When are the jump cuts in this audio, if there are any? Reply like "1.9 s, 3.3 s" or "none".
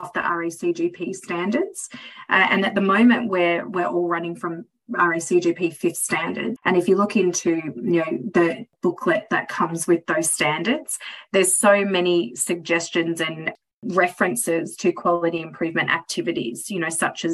6.6 s